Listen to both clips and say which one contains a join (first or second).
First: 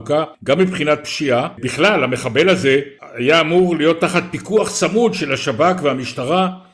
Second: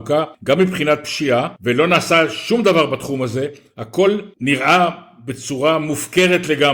second